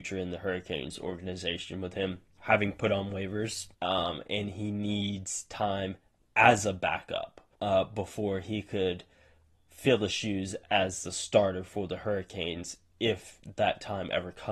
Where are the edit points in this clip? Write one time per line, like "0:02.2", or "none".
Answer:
0:03.7
0:07.5